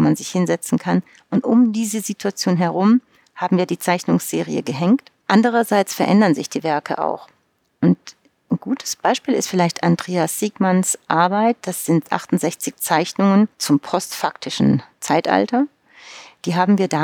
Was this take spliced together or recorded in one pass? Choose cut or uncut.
cut